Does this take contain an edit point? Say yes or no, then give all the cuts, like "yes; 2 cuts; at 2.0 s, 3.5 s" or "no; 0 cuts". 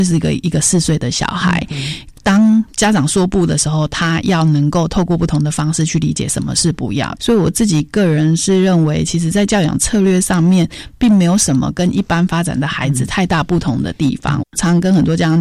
yes; 2 cuts; at 7.2 s, 14.4 s